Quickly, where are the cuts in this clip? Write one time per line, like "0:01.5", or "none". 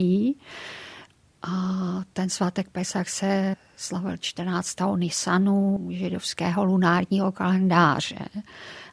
none